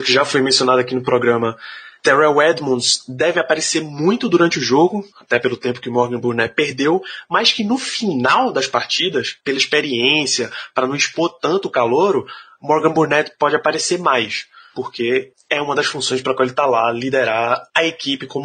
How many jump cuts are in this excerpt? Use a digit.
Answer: 0